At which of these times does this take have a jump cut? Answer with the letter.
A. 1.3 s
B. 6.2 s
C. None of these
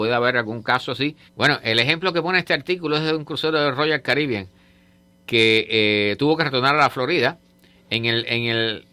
A